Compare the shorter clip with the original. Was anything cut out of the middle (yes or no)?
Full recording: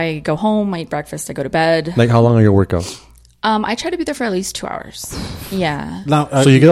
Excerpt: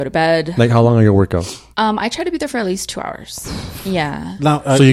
yes